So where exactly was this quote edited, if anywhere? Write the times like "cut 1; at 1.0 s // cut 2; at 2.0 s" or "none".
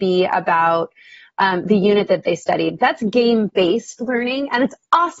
none